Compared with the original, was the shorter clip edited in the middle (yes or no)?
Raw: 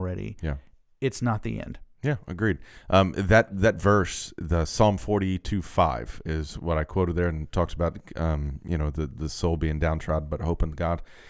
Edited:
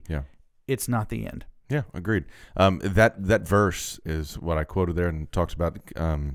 yes